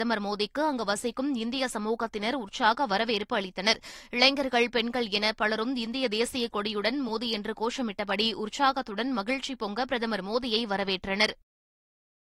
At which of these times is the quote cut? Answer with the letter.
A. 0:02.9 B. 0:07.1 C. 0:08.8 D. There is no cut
B